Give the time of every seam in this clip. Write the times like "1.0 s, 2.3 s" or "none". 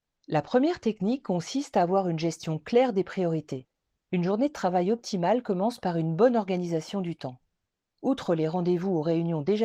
none